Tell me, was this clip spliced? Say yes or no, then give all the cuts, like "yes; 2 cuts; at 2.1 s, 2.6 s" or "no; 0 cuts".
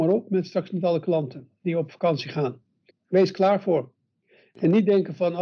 yes; 1 cut; at 2.9 s